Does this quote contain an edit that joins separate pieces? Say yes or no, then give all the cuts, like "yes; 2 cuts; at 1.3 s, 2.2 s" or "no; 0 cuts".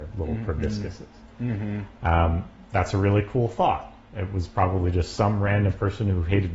no; 0 cuts